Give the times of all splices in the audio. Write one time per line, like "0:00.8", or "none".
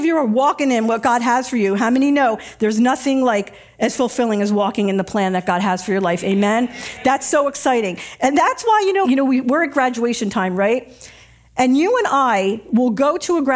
0:09.0